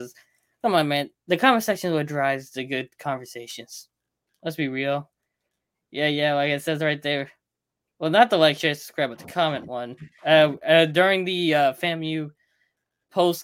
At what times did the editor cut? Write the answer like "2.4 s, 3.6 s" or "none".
none